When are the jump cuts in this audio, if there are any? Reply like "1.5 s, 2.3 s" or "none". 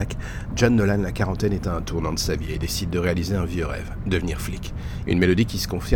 5.1 s